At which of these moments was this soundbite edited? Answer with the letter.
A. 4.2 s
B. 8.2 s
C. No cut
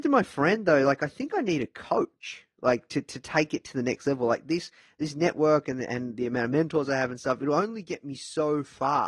C